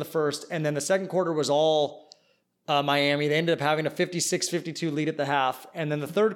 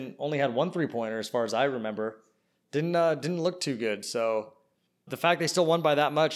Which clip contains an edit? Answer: second; 1 cut; at 5.1 s

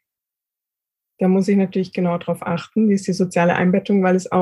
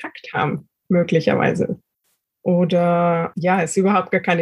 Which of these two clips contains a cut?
second; 2 cuts; at 2.2 s, 3.3 s

